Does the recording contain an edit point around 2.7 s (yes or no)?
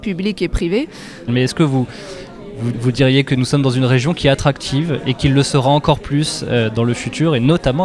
yes